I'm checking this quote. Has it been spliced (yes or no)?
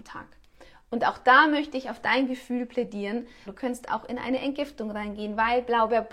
yes